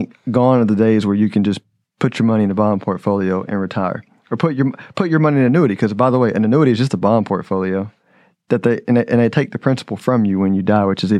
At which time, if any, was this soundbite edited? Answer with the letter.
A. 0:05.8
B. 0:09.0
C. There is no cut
C